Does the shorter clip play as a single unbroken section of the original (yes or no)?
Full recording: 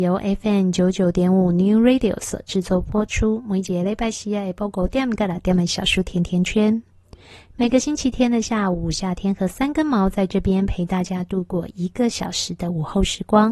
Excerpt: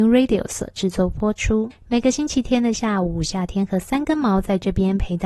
no